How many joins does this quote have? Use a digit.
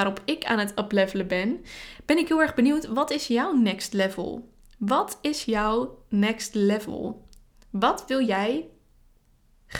0